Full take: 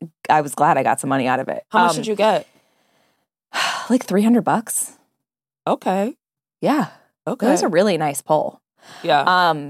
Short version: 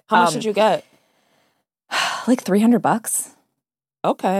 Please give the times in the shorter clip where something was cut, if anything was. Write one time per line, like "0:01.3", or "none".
none